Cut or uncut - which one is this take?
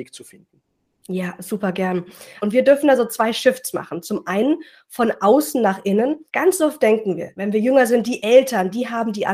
cut